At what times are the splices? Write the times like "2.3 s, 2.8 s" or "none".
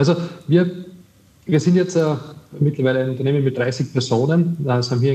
none

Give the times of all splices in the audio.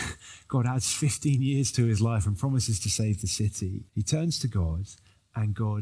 3.9 s

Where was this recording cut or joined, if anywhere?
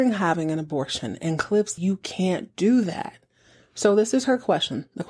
1.8 s

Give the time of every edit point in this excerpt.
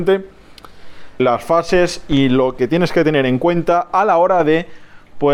1.2 s

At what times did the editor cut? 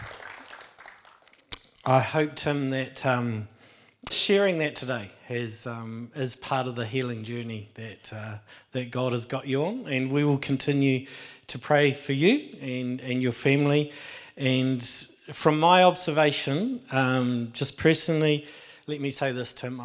4.1 s

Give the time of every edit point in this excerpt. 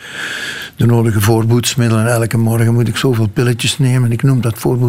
none

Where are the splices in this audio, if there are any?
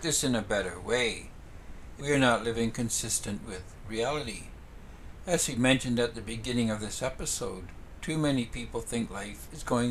2.0 s

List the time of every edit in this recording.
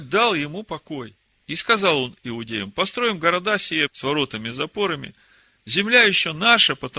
1.4 s, 3.9 s

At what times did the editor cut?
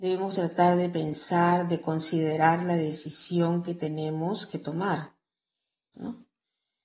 5.9 s

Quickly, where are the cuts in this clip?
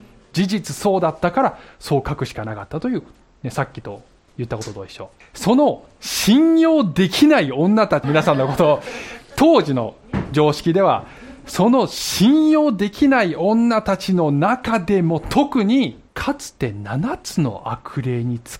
5.2 s, 8.0 s, 16.1 s

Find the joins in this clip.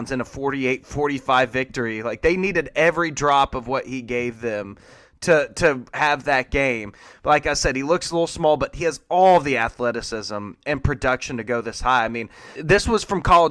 12.6 s

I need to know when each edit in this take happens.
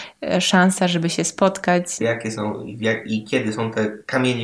2.0 s

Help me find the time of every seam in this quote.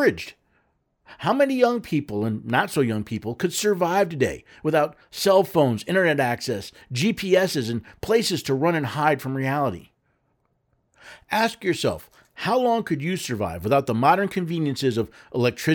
none

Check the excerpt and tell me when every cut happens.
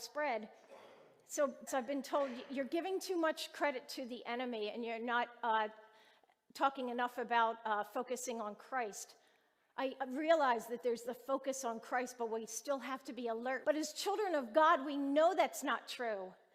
1.7 s, 13.6 s

